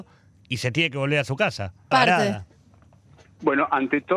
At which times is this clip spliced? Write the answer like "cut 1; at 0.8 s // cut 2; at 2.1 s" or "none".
cut 1; at 1.9 s